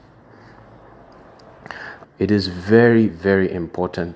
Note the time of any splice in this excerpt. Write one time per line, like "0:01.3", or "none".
0:02.0
0:03.1